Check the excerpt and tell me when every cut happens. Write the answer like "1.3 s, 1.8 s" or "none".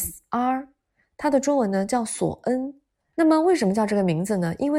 3.0 s